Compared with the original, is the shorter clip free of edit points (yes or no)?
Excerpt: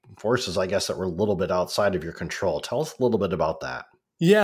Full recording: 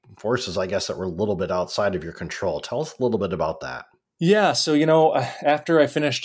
yes